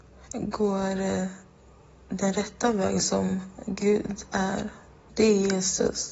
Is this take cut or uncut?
cut